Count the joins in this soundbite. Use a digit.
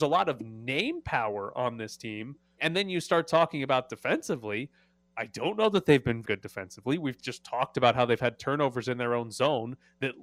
2